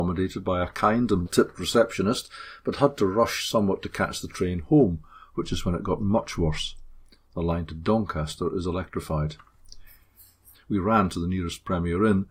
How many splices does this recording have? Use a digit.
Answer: 3